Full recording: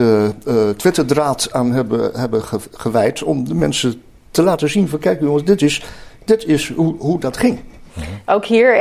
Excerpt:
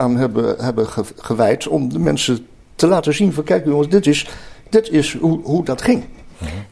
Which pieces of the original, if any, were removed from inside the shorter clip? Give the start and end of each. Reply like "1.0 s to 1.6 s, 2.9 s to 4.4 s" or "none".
none